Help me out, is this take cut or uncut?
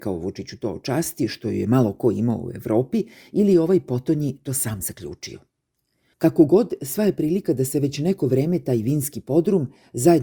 uncut